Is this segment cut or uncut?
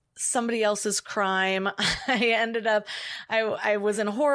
uncut